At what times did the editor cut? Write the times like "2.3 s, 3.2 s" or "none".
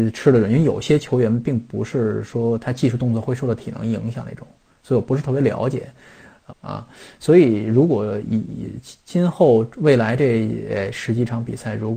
6.5 s